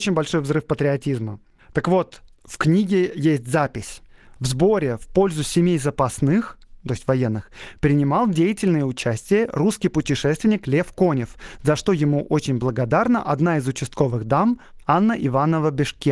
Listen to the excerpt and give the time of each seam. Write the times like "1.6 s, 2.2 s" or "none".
none